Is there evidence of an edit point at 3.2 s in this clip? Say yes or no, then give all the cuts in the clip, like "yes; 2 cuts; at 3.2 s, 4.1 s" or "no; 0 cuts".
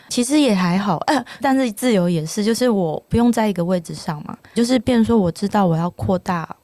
no; 2 cuts; at 1.4 s, 4.5 s